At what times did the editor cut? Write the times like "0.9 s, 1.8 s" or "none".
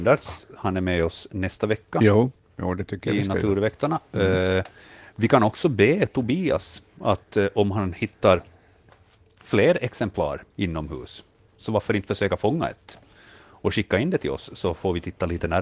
none